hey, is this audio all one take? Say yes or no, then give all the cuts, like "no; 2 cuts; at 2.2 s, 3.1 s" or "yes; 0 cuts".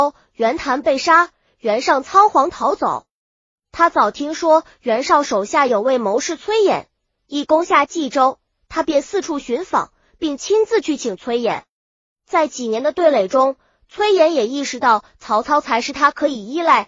no; 1 cut; at 3.6 s